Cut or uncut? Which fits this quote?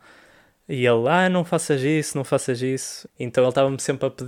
cut